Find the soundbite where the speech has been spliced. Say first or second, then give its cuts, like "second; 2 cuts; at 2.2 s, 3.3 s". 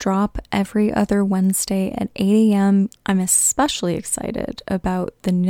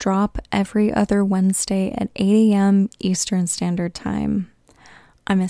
first; 1 cut; at 3.0 s